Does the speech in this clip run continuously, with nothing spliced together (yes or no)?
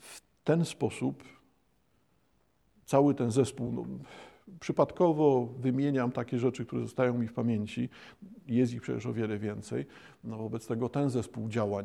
yes